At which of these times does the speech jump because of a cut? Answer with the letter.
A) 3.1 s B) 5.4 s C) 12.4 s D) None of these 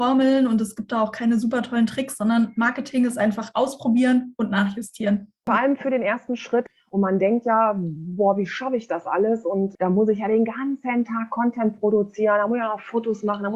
D